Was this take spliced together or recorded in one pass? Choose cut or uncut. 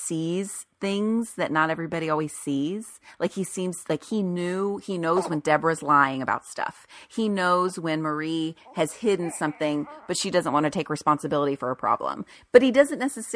uncut